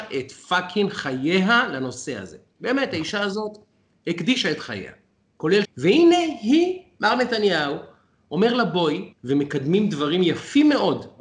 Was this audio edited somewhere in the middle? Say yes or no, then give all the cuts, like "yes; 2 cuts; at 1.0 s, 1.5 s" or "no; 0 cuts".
yes; 2 cuts; at 5.6 s, 9.1 s